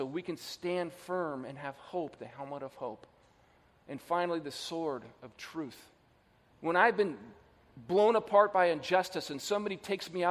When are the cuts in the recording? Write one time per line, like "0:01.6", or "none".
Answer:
0:02.2
0:06.5